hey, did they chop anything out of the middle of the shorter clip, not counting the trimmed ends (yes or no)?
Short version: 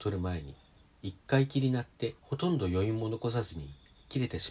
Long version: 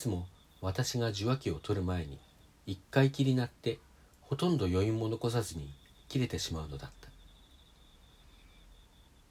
yes